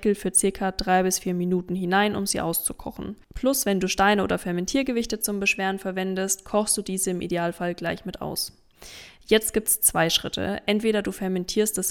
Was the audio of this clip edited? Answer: no; 0 cuts

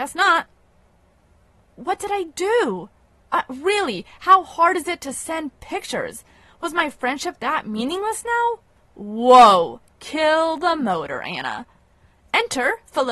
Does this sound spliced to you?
no; 0 cuts

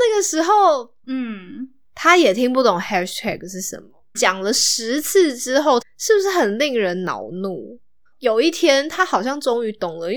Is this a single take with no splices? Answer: no; 3 cuts; at 1.0 s, 4.1 s, 5.8 s

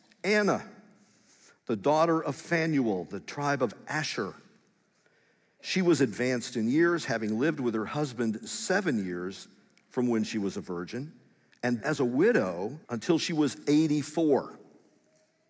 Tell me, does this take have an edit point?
yes; 2 cuts; at 11.8 s, 12.8 s

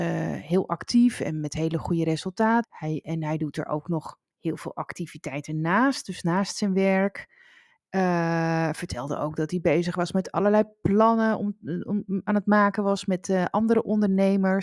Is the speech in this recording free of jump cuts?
no; 1 cut; at 2.6 s

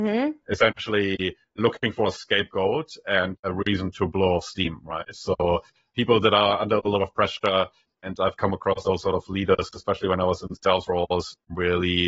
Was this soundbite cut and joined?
no; 0 cuts

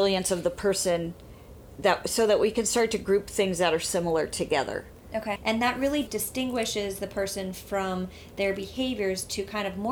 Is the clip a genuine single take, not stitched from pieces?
no; 1 cut; at 5.4 s

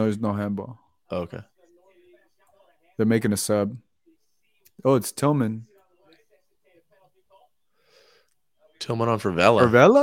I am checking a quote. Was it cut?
no; 0 cuts

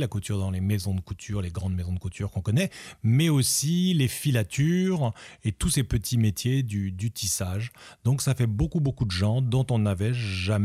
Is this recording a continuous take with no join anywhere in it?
yes; 0 cuts

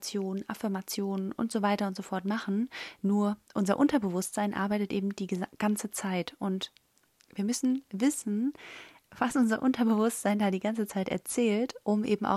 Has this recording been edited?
no; 0 cuts

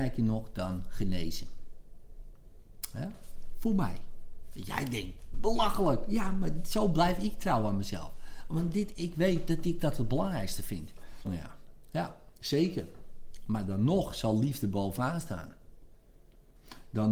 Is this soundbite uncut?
no; 2 cuts; at 5.3 s, 11.3 s

